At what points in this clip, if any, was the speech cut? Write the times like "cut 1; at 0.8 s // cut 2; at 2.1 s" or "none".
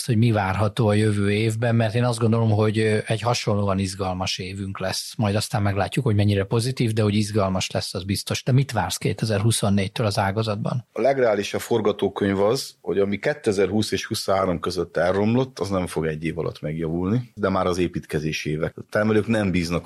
cut 1; at 17.4 s // cut 2; at 18.7 s